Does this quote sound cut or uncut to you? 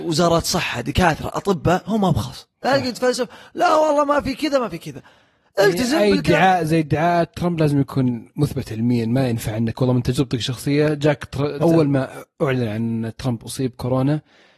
cut